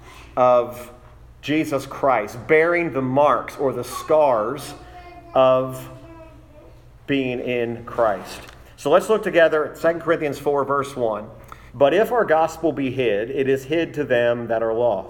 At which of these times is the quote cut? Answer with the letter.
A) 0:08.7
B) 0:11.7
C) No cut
B